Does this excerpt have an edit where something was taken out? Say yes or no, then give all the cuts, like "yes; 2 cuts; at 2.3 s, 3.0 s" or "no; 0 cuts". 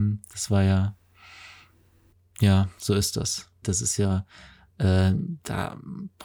yes; 1 cut; at 3.6 s